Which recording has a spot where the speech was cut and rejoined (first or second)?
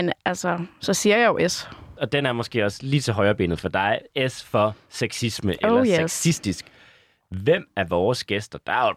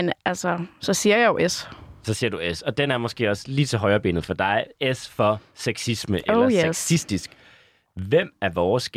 first